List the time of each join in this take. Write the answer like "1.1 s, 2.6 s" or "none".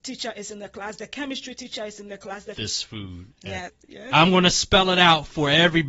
2.5 s, 3.7 s